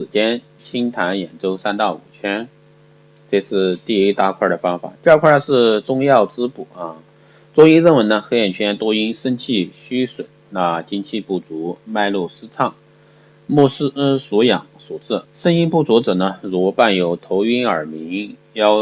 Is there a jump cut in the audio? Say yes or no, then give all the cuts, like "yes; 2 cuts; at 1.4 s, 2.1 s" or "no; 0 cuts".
yes; 1 cut; at 15.3 s